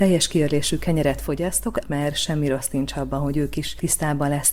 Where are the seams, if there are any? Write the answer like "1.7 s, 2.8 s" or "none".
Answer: 1.8 s